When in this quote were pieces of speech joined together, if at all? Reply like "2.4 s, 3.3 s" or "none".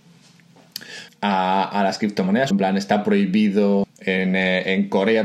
1.1 s, 2.5 s, 3.8 s

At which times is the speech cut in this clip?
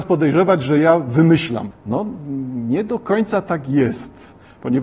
1.7 s

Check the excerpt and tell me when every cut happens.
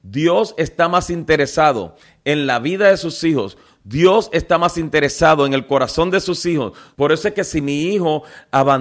6.9 s

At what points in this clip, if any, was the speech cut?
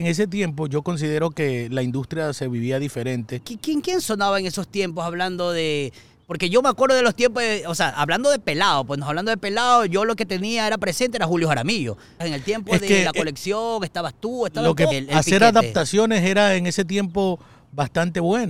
12.2 s, 14.9 s

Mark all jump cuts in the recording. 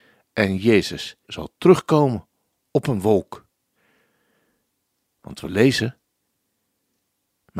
1.2 s

